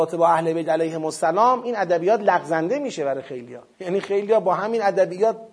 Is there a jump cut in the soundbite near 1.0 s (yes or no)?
no